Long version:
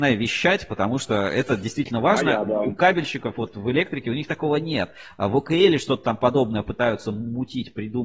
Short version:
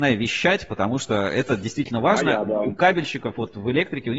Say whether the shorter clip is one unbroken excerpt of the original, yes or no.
yes